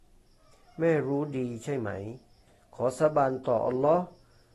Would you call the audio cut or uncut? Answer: uncut